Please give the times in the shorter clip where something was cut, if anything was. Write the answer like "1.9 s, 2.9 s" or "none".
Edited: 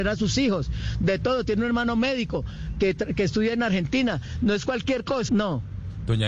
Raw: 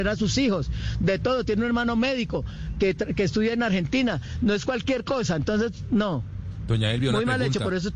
5.3 s